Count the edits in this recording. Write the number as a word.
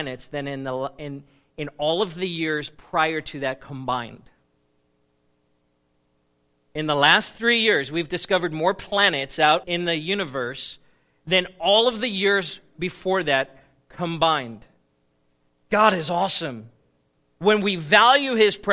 two